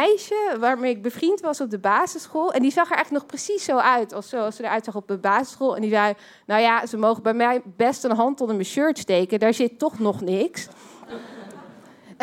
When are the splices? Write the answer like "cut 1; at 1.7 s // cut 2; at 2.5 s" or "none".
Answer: none

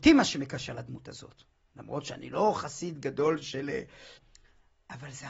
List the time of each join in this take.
cut 1; at 4.2 s

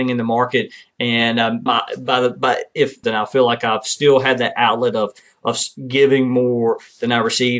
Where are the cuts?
cut 1; at 1.7 s // cut 2; at 3.0 s

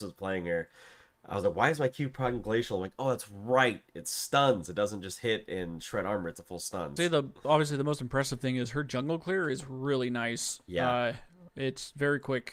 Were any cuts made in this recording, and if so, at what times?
cut 1; at 7.0 s

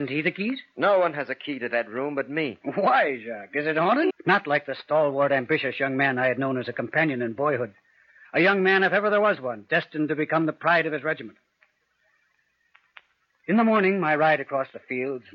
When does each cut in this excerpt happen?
cut 1; at 4.1 s

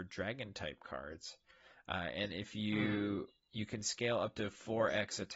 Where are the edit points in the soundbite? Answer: cut 1; at 2.3 s

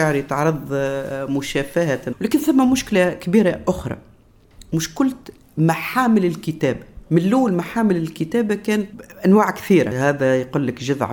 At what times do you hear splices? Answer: cut 1; at 7.1 s

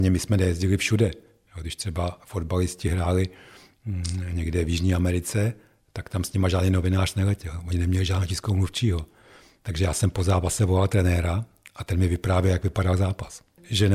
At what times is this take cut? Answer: none

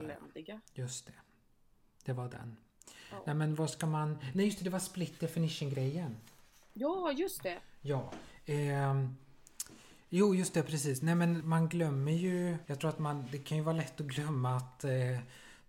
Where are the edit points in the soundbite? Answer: cut 1; at 11.4 s // cut 2; at 12.7 s

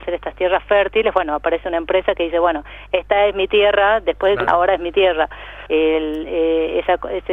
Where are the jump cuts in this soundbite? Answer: cut 1; at 4.5 s // cut 2; at 5.7 s

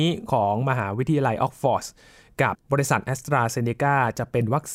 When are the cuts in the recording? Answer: cut 1; at 2.5 s

